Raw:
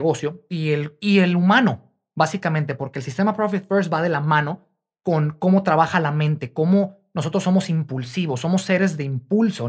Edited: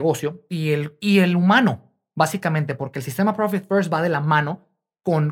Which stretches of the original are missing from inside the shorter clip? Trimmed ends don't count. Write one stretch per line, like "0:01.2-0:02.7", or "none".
none